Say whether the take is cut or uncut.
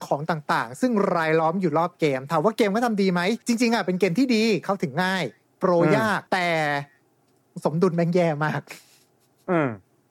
cut